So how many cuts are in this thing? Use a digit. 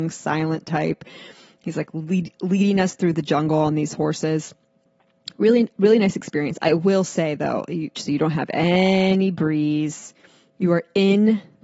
1